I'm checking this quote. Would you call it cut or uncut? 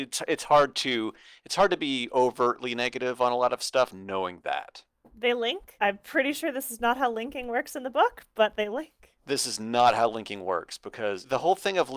cut